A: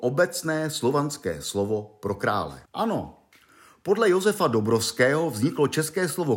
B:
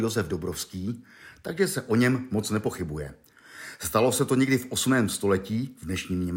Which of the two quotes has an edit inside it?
A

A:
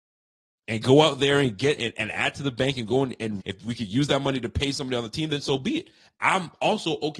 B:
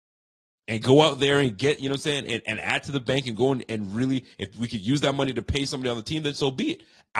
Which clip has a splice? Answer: A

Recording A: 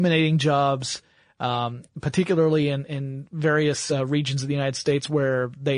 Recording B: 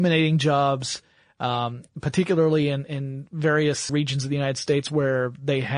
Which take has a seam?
B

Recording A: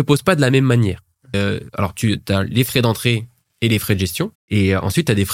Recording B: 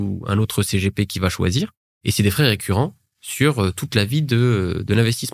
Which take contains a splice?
A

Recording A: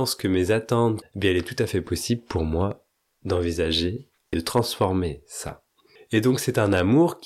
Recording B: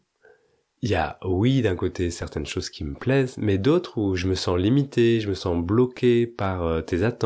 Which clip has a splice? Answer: A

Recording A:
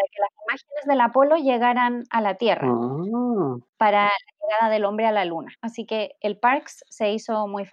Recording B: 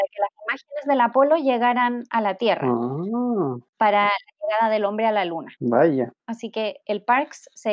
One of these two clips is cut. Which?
A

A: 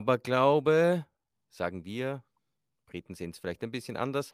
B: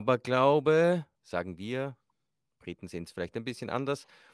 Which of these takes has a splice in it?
B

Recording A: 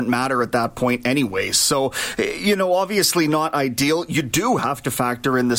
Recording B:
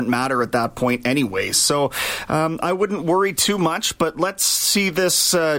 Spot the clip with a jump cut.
B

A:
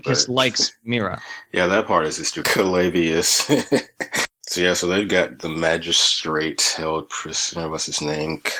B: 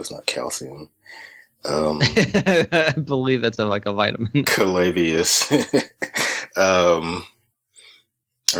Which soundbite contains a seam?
A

